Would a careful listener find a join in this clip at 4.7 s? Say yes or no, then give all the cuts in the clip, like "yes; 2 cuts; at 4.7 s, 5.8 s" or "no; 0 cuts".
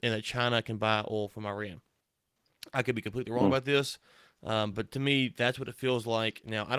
no; 0 cuts